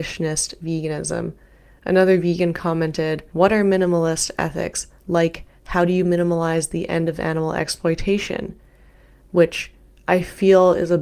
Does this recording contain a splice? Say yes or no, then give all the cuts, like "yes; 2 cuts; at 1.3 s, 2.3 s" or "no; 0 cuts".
no; 0 cuts